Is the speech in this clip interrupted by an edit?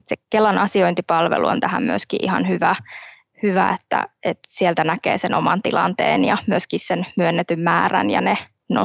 no; 0 cuts

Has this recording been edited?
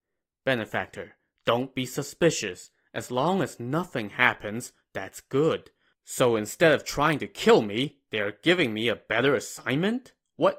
yes; 1 cut; at 5.9 s

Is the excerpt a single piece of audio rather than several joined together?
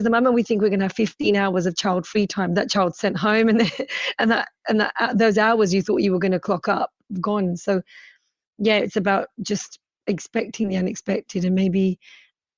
yes; 0 cuts

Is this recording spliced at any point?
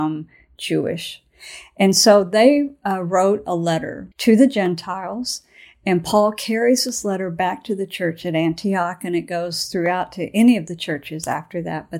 yes; 1 cut; at 4.1 s

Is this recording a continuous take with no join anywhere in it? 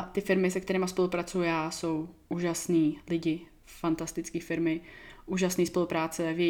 yes; 0 cuts

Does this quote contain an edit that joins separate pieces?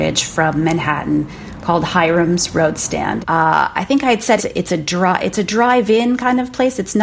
yes; 2 cuts; at 3.2 s, 4.4 s

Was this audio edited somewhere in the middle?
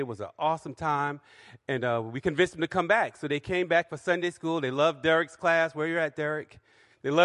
no; 0 cuts

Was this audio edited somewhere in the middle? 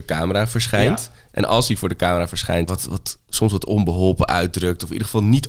yes; 1 cut; at 2.7 s

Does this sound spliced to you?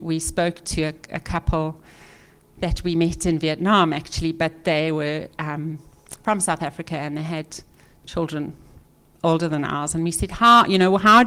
no; 0 cuts

